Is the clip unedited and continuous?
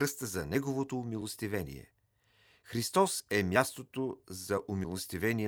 yes; 0 cuts

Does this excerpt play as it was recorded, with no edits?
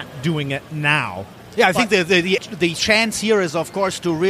no; 1 cut; at 2.4 s

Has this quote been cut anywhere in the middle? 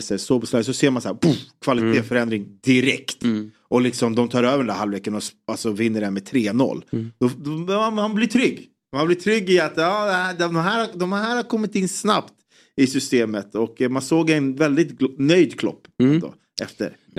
no; 0 cuts

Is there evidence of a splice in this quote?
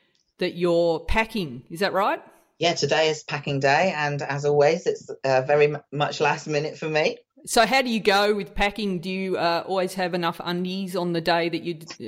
no; 0 cuts

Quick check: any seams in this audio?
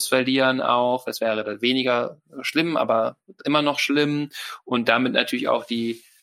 no; 0 cuts

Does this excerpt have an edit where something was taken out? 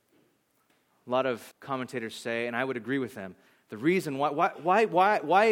yes; 1 cut; at 1.5 s

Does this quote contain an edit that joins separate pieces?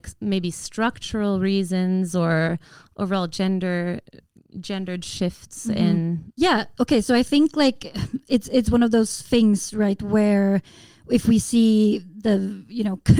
no; 0 cuts

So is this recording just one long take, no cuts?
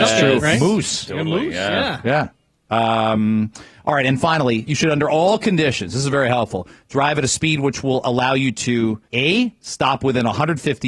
no; 1 cut; at 9.1 s

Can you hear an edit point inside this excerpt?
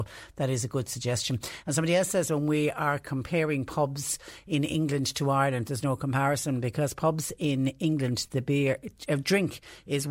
no; 0 cuts

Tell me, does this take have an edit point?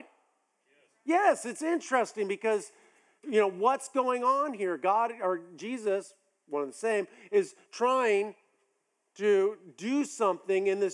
no; 0 cuts

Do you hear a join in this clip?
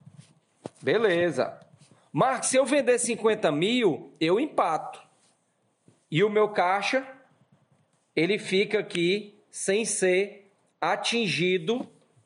no; 0 cuts

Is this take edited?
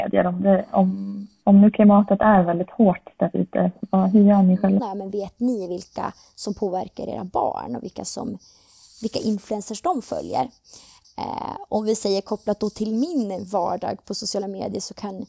yes; 2 cuts; at 4.8 s, 11.0 s

